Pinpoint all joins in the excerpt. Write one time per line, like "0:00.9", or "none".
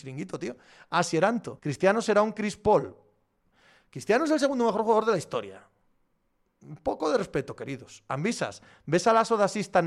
0:01.6